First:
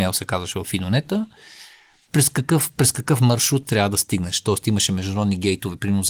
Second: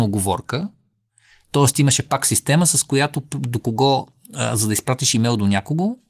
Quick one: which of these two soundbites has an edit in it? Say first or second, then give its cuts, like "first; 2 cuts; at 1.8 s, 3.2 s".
first; 1 cut; at 3.6 s